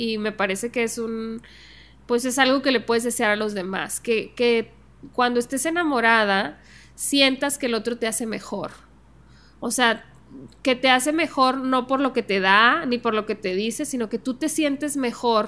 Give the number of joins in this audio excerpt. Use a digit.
0